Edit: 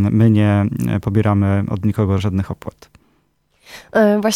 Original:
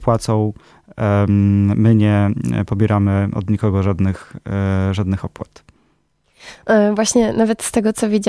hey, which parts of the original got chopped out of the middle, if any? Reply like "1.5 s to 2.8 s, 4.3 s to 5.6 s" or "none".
3.8 s to 4.9 s

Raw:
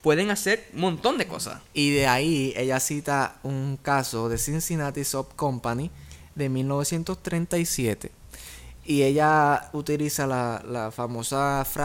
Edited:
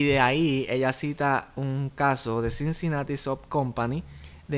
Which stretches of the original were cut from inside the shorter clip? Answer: none

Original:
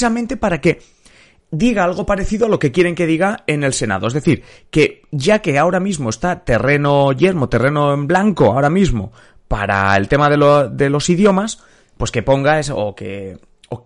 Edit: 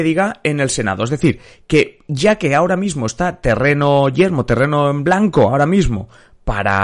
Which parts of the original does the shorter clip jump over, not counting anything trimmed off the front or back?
none

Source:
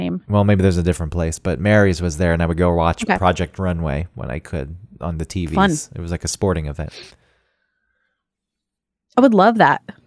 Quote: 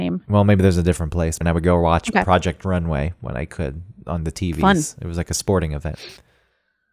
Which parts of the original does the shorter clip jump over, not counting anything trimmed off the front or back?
1.4 s to 2.3 s

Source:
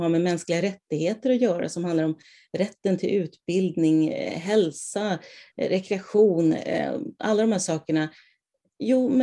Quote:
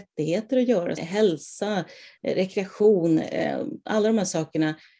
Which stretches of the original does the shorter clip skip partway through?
1.7 s to 4.3 s

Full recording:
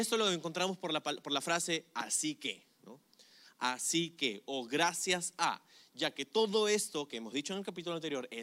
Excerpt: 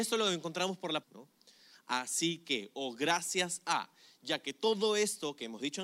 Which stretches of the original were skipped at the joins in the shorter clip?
1.0 s to 2.7 s

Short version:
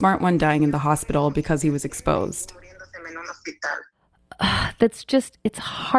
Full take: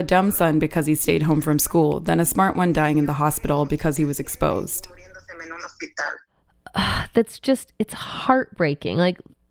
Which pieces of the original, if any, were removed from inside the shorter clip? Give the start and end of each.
none

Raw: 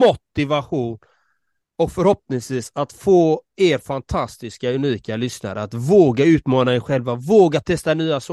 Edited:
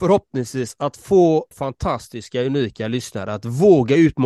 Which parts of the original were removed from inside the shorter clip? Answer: 3.5 s to 3.8 s

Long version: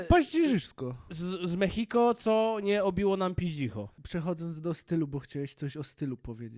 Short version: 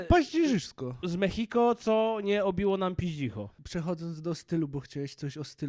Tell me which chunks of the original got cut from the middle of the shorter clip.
1.0 s to 1.4 s

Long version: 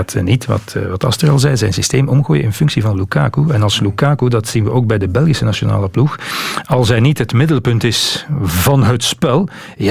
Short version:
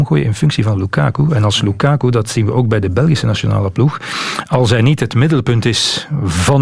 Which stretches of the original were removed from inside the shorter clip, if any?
none

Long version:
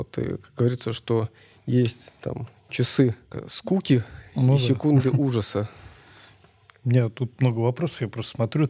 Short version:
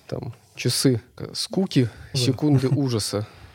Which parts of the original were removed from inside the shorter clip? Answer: 4.3 s to 4.6 s

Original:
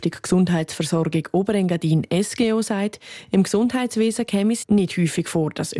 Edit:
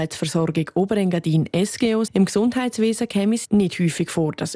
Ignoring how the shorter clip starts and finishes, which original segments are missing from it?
2.7 s to 3.3 s

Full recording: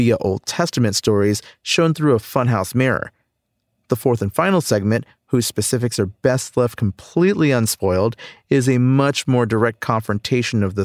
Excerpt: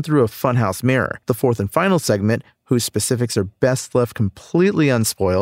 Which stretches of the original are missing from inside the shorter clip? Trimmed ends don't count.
3.1 s to 3.9 s

